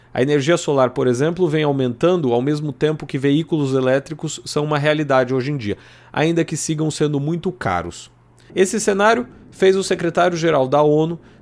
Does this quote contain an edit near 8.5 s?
yes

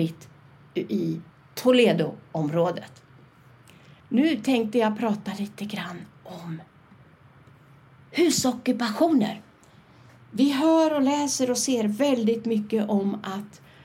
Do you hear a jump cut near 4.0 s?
yes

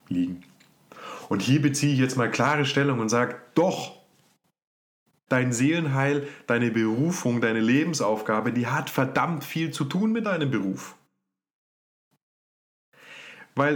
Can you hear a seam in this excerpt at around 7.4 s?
no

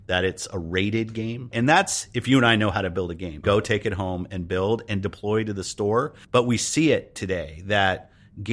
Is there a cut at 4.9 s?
no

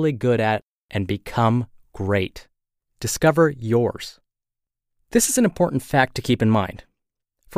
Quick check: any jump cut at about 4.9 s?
no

